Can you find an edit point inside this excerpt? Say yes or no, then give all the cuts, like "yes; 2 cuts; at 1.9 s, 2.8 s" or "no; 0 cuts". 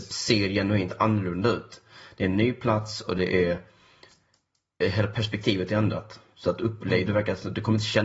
no; 0 cuts